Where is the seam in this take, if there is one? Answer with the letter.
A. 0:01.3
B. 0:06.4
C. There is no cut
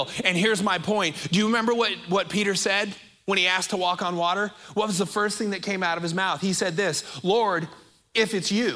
C